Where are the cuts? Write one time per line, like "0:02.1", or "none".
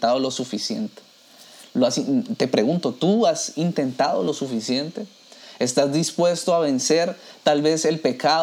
none

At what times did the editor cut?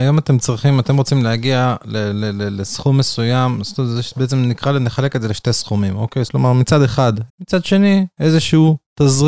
0:06.3
0:07.3

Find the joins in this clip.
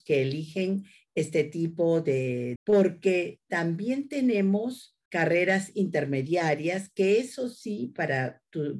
0:02.6
0:05.1

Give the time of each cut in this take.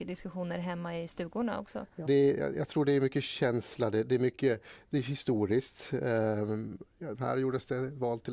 0:02.1
0:07.1

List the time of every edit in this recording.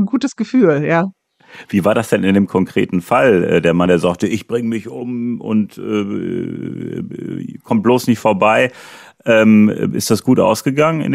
none

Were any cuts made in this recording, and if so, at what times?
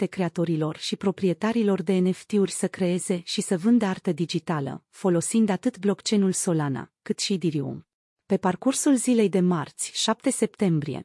0:08.1

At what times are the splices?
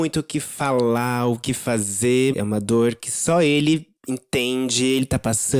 0:02.3
0:04.0

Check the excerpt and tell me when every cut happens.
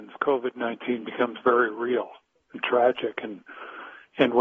none

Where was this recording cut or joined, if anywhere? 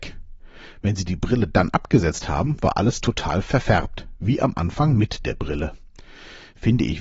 none

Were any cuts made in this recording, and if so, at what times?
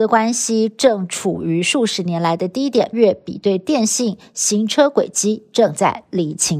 0:02.9

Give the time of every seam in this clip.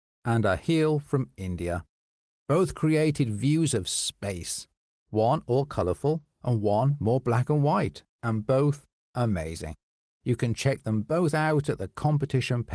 none

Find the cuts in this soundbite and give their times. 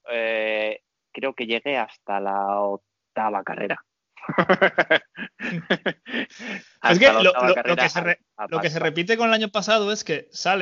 none

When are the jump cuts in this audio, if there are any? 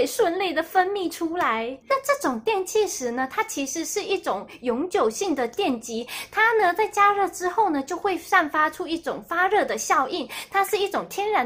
0:01.9

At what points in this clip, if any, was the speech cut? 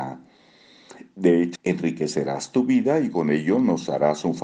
0:01.6

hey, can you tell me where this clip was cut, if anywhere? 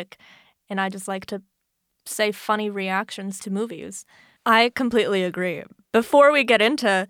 0:04.4

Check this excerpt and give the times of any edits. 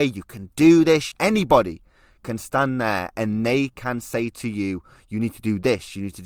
0:01.1

